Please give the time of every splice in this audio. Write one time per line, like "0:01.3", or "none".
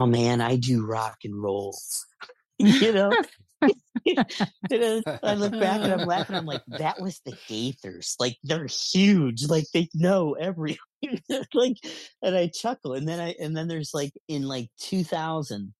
0:05.0
0:14.2

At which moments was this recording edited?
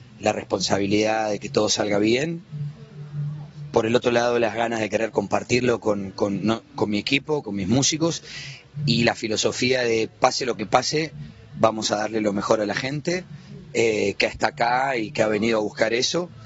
0:07.4

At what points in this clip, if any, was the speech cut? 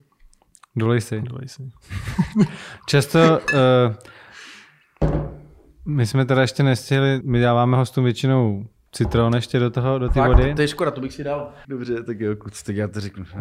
0:07.2
0:11.6

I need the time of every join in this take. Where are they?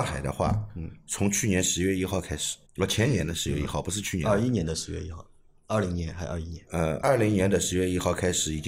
0:02.7
0:07.0

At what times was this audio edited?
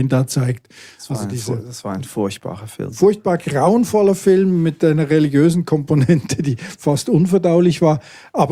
none

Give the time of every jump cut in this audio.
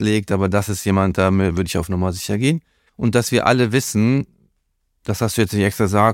0:02.9

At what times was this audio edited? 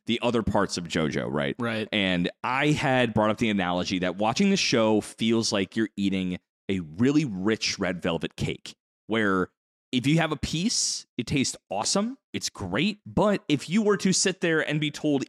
0:13.0

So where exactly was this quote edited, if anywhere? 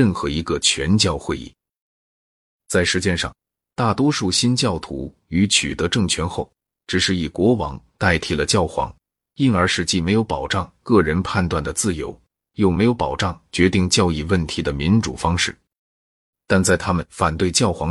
0:02.6

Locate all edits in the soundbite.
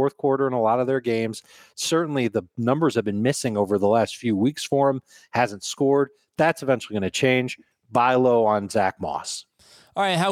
none

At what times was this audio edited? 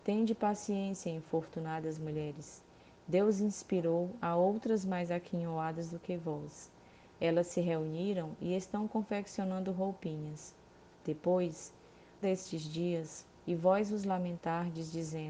0:12.2
0:13.3

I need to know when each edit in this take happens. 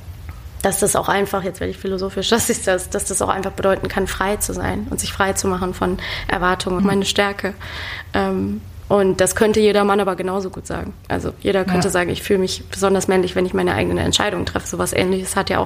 0:06.8

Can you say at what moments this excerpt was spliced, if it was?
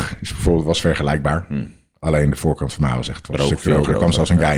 0:03.3

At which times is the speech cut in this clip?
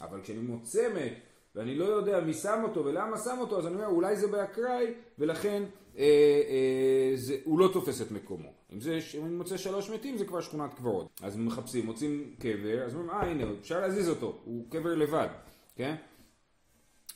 0:11.1

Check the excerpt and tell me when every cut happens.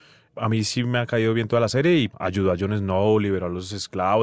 0:02.1

